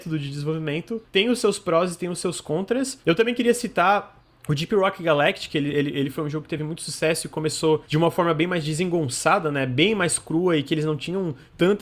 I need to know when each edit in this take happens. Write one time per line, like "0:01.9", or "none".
none

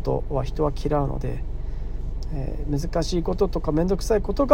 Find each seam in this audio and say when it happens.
none

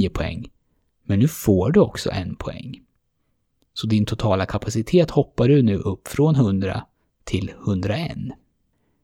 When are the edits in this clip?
none

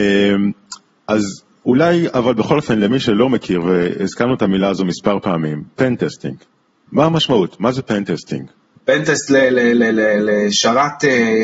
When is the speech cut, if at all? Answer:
0:08.8

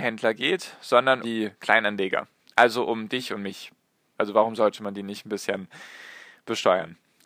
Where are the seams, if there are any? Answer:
0:01.2
0:04.2

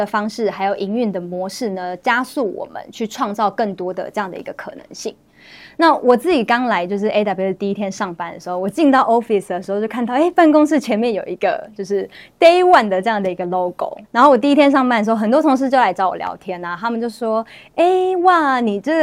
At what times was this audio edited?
0:14.0

